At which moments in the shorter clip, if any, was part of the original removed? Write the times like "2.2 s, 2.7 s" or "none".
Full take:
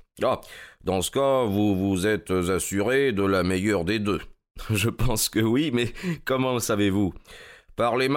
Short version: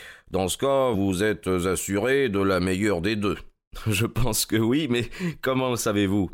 0.9 s